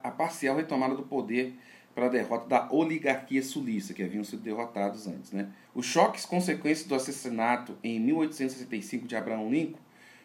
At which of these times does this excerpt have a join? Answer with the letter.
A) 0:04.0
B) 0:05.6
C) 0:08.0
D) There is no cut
B